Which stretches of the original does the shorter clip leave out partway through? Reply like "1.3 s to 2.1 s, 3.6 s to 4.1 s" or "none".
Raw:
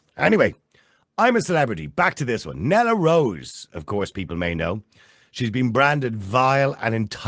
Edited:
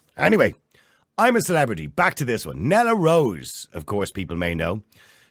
none